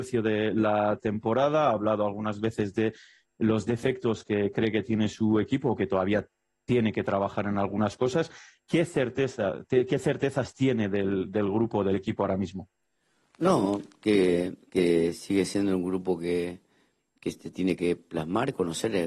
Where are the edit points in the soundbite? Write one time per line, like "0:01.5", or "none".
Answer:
none